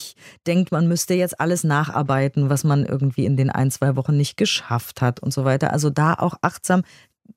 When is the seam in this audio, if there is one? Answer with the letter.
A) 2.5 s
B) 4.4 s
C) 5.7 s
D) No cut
D